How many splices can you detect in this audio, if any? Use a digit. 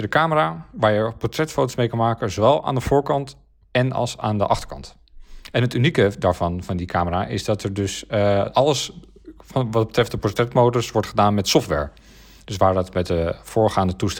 0